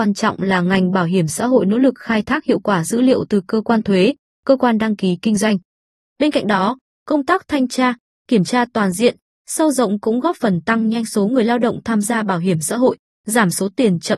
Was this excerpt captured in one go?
no; 1 cut; at 6.0 s

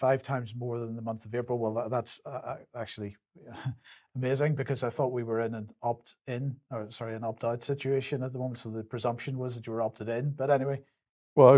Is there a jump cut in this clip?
no; 0 cuts

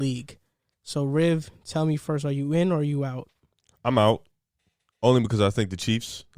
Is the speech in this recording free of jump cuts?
yes; 0 cuts

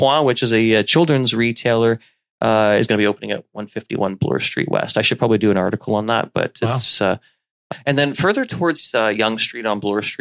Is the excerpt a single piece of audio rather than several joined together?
yes; 0 cuts

